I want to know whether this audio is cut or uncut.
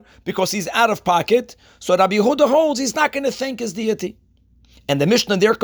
uncut